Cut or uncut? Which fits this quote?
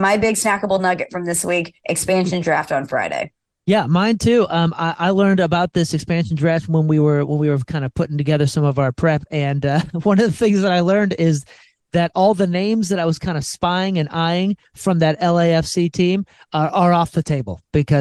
uncut